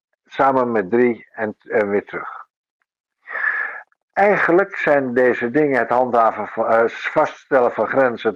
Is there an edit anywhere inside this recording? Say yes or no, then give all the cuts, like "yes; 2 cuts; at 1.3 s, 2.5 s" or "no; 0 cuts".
no; 0 cuts